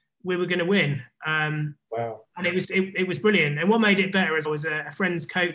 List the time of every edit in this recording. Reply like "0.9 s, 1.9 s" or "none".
2.6 s, 4.4 s